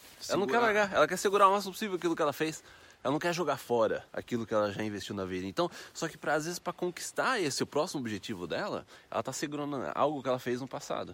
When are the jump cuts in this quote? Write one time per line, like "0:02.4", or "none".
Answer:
0:04.1